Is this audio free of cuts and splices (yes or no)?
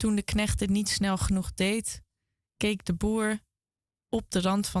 yes